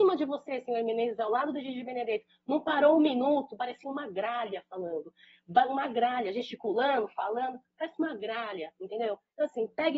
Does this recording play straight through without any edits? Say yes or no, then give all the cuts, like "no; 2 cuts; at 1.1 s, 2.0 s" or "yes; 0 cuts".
yes; 0 cuts